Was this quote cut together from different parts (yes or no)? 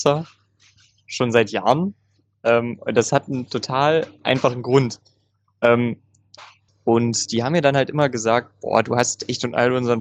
yes